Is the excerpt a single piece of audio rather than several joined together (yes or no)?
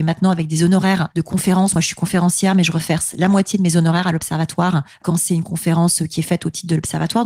yes